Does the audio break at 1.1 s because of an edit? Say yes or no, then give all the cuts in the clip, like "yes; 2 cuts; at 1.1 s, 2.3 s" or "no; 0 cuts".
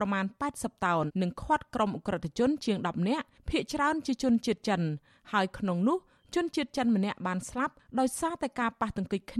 yes; 1 cut; at 1.1 s